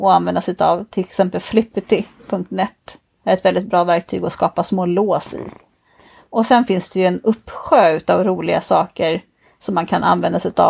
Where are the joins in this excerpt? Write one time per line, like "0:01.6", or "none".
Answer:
none